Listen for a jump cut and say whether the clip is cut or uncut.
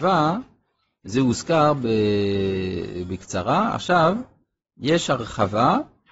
uncut